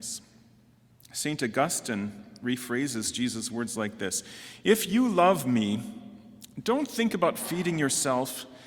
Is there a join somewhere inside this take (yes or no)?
no